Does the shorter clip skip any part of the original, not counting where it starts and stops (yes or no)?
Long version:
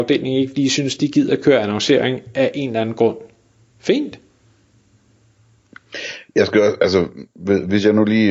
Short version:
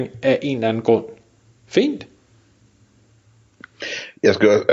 no